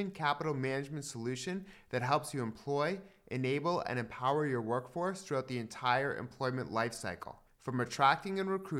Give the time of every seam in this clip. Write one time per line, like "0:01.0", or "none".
none